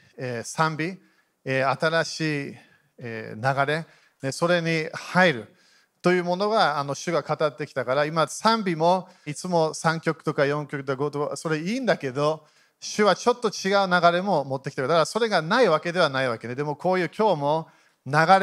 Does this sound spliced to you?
yes; 1 cut; at 9.3 s

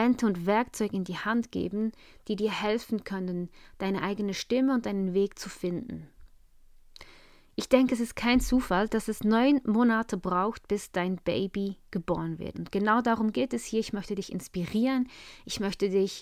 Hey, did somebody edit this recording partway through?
yes; 1 cut; at 12.5 s

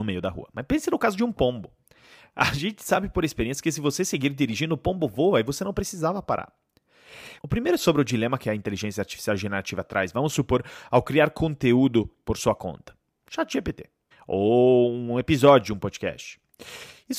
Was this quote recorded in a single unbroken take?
no; 2 cuts; at 7.4 s, 14.1 s

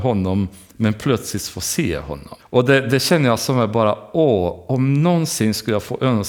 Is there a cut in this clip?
yes; 1 cut; at 2.4 s

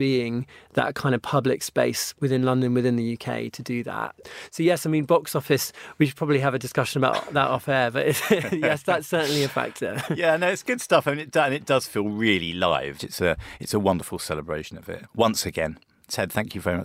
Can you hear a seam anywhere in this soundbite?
yes; 1 cut; at 13.0 s

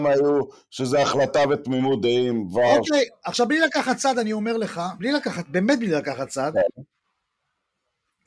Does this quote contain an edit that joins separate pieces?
no; 0 cuts

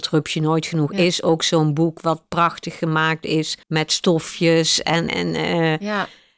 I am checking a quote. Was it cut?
yes; 2 cuts; at 3.6 s, 5.1 s

